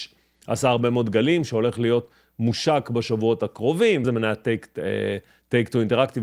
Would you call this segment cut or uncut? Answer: cut